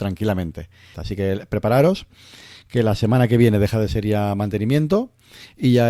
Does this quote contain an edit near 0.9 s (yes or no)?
yes